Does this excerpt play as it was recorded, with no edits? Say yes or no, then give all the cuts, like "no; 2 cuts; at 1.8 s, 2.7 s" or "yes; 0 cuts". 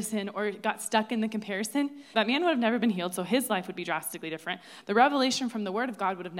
no; 1 cut; at 2.1 s